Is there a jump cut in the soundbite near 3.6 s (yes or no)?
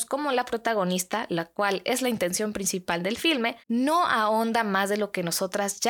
yes